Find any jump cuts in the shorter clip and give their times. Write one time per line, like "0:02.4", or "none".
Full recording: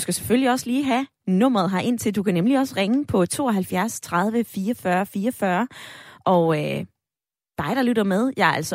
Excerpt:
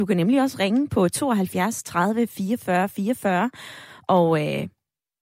none